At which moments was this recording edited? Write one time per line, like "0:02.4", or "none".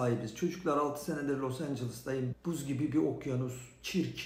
0:02.3